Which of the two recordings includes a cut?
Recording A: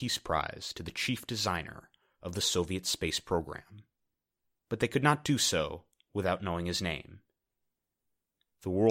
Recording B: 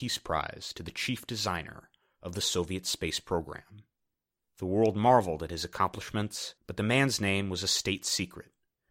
B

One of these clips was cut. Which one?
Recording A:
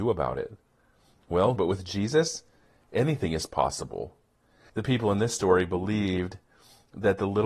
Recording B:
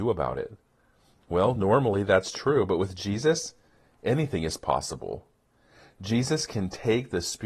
A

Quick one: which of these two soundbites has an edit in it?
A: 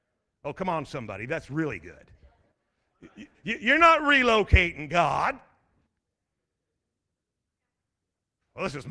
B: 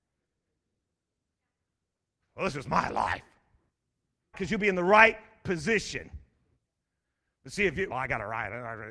B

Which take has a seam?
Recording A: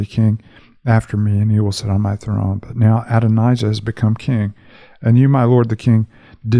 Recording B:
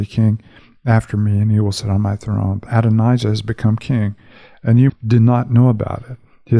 B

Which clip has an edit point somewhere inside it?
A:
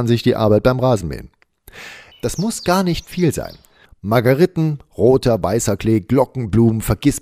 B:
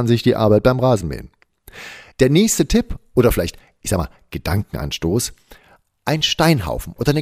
A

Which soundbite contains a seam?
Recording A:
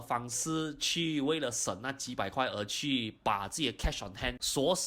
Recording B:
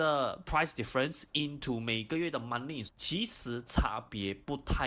B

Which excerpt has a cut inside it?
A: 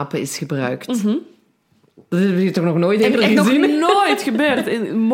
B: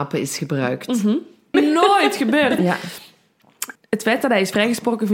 B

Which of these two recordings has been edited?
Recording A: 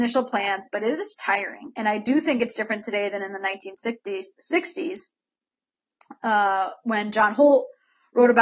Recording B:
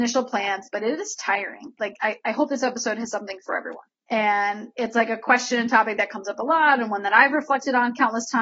B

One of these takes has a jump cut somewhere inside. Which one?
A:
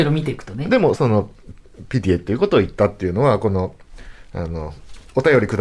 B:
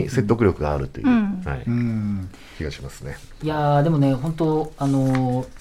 A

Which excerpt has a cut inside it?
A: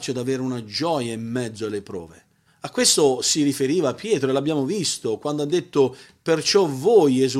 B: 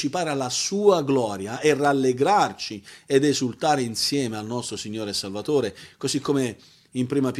A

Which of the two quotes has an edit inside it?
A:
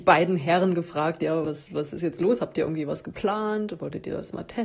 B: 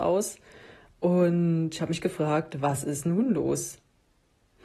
A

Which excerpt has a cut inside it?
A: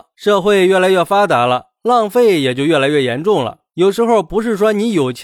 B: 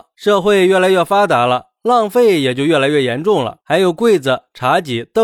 B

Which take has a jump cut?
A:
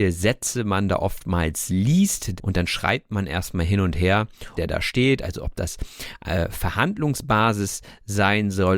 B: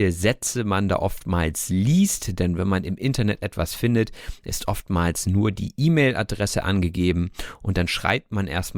A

